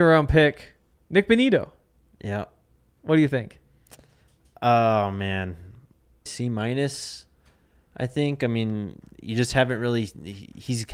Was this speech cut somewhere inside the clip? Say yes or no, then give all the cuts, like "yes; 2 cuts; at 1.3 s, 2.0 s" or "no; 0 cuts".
yes; 1 cut; at 6.3 s